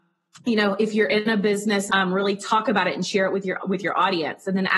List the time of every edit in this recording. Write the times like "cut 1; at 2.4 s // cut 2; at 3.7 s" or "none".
cut 1; at 1.9 s // cut 2; at 3.6 s